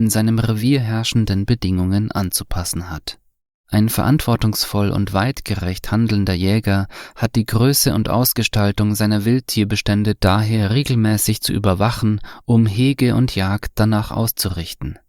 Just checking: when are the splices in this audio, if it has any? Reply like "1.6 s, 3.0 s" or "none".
none